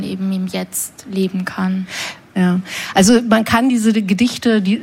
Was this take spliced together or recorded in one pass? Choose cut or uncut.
cut